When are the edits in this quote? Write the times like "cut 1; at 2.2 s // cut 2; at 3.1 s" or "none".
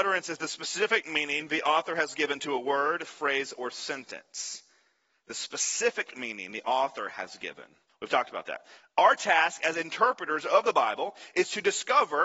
cut 1; at 7.9 s